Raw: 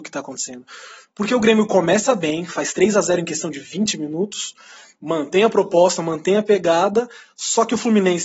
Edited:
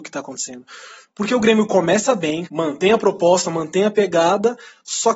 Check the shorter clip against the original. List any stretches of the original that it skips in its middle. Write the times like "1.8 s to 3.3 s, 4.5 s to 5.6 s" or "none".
2.5 s to 5.0 s